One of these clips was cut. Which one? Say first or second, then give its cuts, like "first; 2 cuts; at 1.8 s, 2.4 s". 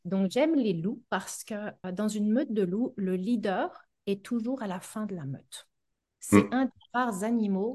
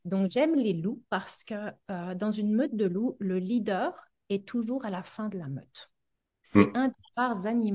first; 1 cut; at 1.8 s